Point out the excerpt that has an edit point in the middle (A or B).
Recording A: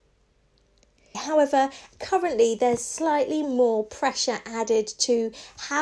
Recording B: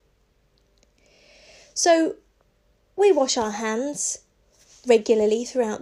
A